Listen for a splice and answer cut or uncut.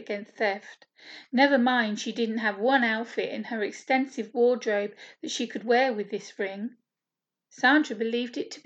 uncut